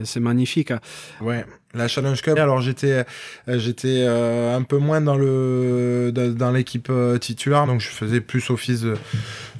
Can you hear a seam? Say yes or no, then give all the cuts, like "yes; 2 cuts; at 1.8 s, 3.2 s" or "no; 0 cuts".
yes; 3 cuts; at 1.2 s, 2.4 s, 7.7 s